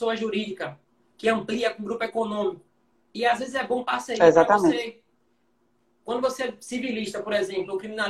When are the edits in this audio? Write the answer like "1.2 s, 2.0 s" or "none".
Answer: 3.0 s